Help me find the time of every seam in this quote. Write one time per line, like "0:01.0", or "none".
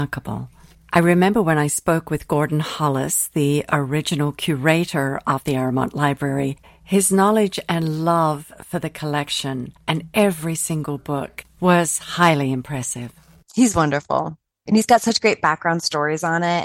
none